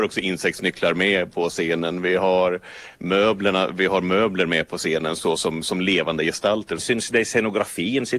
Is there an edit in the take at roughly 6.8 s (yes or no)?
yes